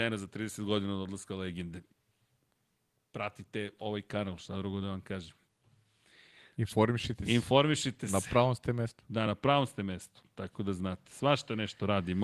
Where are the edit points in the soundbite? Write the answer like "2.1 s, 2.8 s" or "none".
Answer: none